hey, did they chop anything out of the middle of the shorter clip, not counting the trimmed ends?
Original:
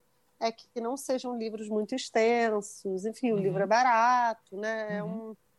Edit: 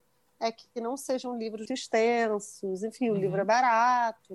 yes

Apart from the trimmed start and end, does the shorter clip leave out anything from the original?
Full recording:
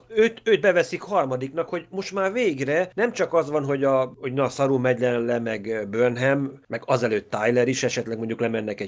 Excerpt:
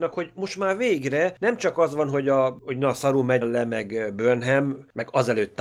yes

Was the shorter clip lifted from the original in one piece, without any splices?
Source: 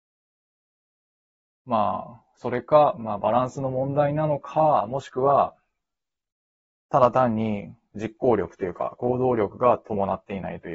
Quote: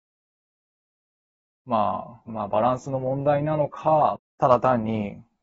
no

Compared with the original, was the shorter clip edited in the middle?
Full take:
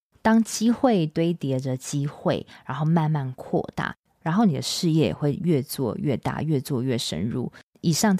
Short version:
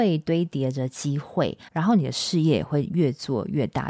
yes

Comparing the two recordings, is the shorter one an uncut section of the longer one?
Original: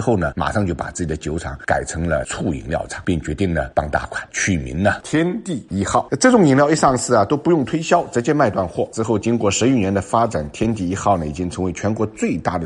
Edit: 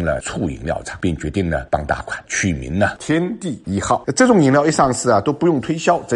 yes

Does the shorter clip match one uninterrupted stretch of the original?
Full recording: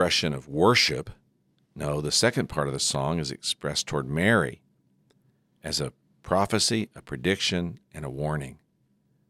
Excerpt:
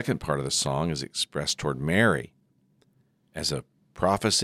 yes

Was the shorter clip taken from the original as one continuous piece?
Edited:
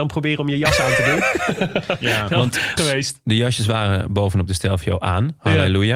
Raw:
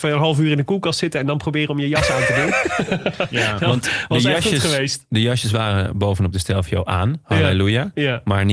no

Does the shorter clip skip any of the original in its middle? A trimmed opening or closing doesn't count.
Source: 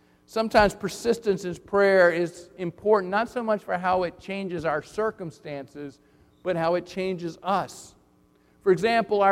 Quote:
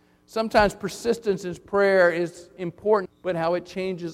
yes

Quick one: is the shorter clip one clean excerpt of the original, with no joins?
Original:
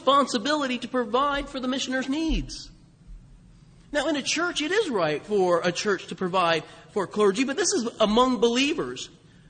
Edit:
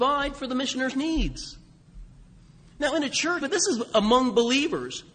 no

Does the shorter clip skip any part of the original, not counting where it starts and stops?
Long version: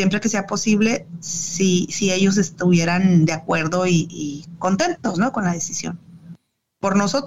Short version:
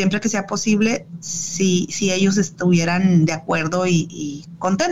no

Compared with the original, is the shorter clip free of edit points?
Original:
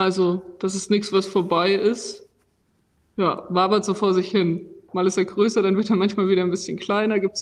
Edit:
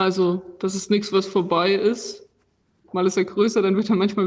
no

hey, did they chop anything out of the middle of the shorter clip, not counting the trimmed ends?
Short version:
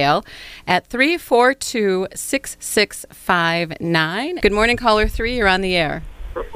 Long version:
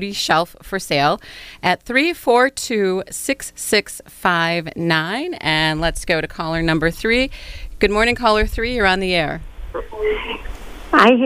yes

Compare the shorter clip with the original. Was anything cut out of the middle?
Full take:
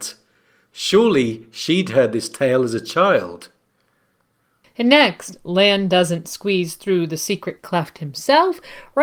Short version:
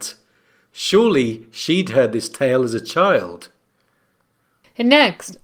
no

